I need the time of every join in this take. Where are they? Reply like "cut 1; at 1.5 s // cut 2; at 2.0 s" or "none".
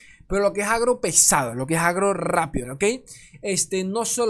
cut 1; at 2.6 s